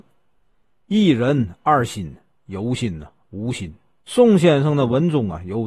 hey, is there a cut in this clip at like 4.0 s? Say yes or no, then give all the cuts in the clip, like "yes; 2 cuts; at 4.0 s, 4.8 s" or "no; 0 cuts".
yes; 1 cut; at 4.0 s